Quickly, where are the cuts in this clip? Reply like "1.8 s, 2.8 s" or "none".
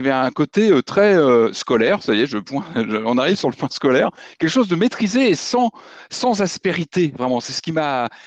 none